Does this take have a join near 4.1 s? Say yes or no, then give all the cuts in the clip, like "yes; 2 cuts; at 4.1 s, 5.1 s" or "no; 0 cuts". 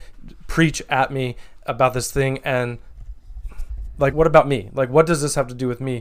yes; 1 cut; at 4.1 s